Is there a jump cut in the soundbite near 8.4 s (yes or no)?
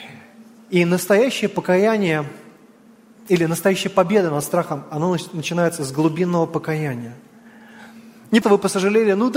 yes